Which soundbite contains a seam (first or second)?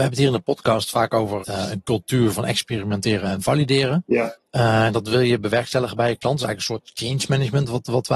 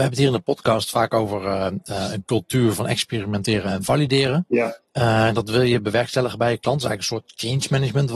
first